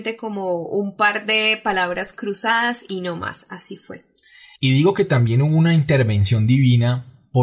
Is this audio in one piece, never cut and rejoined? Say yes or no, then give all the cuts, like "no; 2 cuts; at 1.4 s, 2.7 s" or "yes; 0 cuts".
yes; 0 cuts